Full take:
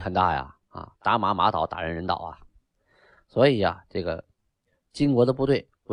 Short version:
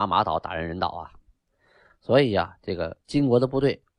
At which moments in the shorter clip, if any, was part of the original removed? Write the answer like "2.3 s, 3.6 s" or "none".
3.0 s